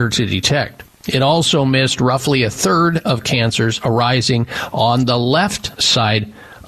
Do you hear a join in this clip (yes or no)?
no